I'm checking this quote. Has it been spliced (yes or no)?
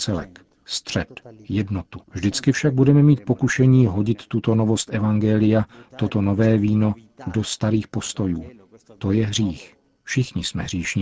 yes